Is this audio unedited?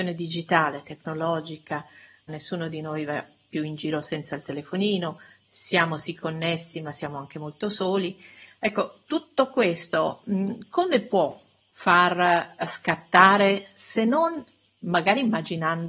no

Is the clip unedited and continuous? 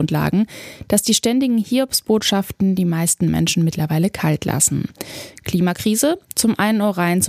yes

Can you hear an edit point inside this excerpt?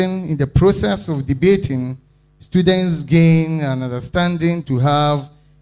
no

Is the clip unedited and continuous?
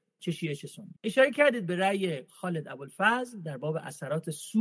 no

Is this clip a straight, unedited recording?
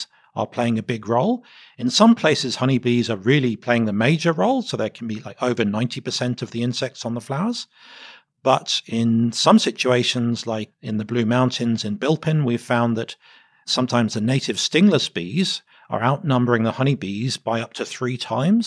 yes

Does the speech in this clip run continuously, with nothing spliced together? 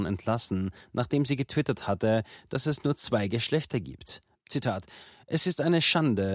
no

